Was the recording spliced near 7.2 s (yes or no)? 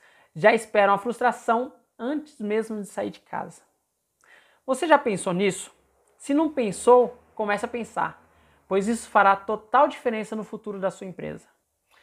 no